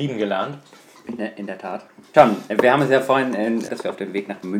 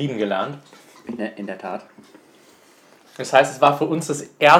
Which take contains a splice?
first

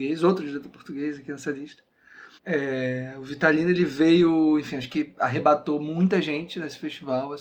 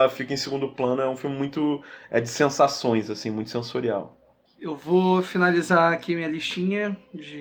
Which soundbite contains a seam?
first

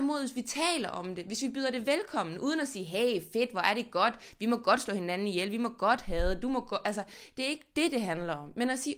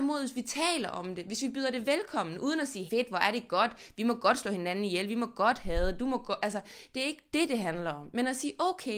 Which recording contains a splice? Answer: second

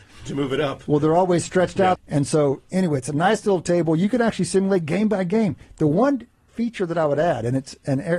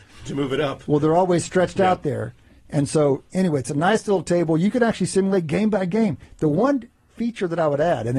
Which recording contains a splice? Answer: first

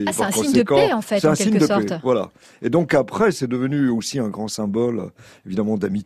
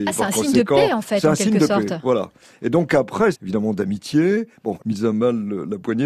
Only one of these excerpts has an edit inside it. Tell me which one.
second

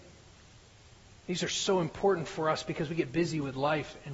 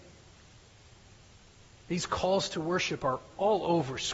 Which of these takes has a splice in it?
first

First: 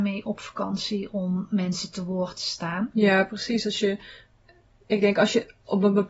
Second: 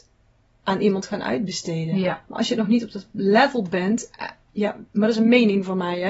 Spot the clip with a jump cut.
first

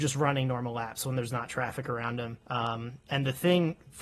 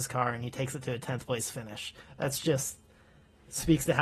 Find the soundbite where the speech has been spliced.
first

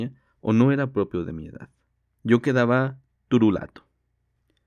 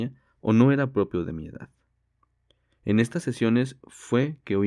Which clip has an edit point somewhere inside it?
first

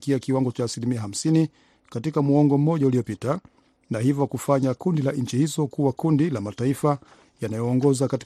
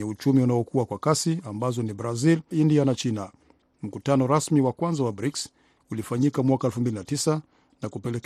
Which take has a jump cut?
second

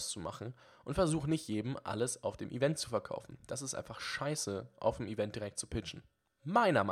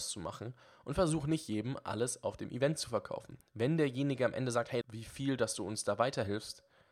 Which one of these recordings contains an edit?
second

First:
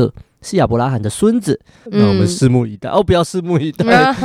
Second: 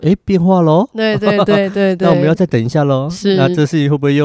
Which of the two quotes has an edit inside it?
first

